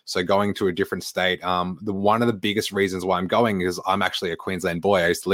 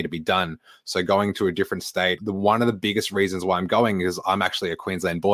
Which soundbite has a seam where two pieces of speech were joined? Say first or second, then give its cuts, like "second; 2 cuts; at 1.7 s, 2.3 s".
second; 1 cut; at 2.2 s